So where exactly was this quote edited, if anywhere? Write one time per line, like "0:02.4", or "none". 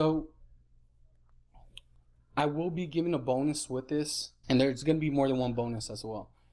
0:04.4